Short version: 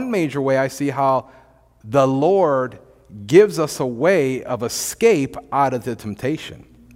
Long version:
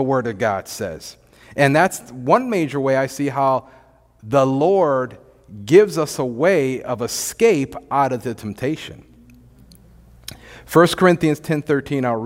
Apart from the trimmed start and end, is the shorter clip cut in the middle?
no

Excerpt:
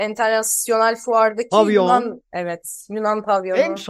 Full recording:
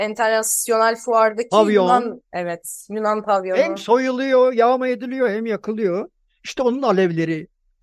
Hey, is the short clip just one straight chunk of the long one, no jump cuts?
yes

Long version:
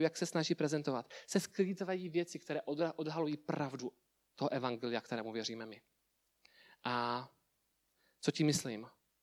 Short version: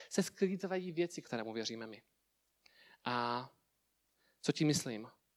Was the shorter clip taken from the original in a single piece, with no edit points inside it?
no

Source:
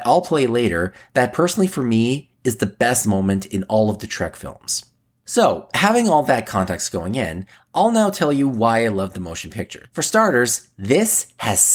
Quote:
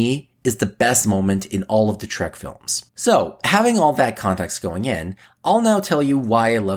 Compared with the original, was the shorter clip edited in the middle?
yes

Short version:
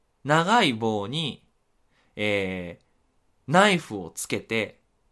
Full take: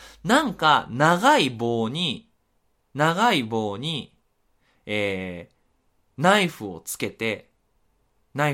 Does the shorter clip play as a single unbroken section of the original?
yes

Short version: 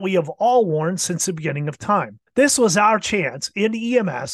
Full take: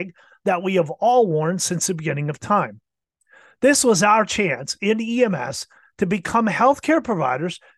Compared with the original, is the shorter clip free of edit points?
no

